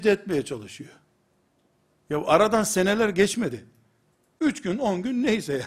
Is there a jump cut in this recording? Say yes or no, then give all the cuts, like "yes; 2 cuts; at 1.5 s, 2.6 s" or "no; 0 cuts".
no; 0 cuts